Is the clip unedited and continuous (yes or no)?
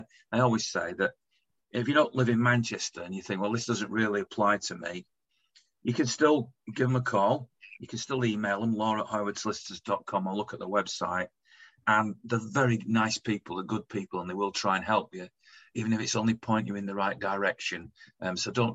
yes